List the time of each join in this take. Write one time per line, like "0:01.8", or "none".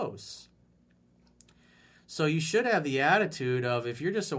none